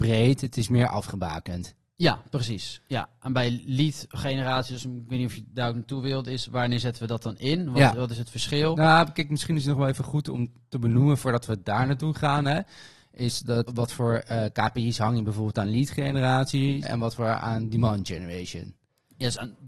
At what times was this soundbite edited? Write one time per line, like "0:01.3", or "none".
0:13.7
0:16.8